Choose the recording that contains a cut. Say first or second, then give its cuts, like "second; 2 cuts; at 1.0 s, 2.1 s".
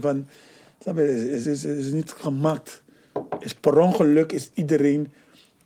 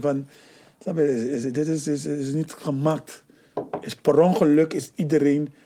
first; 1 cut; at 1.4 s